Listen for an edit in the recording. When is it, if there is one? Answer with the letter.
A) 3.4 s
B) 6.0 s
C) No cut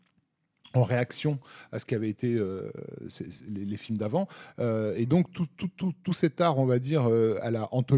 C